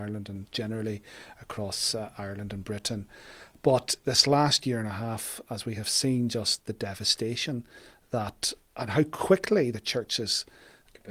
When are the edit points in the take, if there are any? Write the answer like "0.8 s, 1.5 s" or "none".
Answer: none